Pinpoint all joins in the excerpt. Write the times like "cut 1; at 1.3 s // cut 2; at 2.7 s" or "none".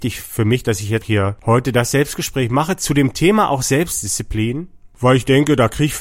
cut 1; at 1.0 s